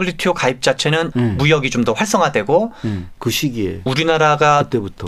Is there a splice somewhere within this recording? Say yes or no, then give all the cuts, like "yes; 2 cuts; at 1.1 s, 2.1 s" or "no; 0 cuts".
yes; 1 cut; at 3.2 s